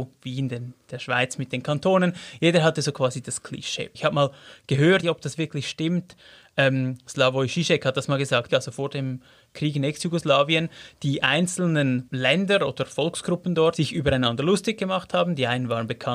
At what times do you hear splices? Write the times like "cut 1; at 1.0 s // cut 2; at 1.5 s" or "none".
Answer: cut 1; at 3.9 s // cut 2; at 5.0 s // cut 3; at 8.5 s

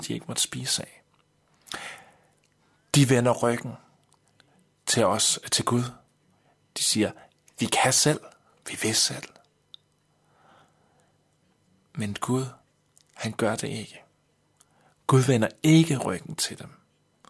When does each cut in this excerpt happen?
none

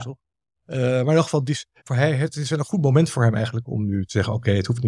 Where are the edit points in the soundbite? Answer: cut 1; at 1.8 s

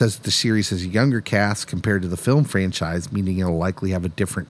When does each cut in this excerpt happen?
none

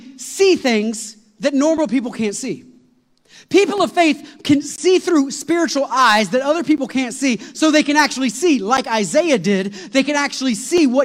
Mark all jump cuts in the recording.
none

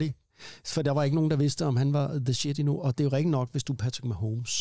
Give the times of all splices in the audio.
none

